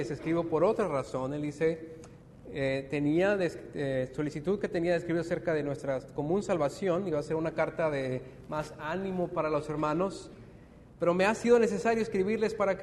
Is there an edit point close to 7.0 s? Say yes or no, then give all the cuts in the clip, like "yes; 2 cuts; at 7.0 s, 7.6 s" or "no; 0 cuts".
no; 0 cuts